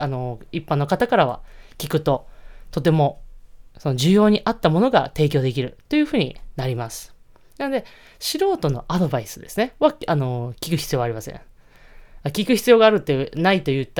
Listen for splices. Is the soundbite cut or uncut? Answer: uncut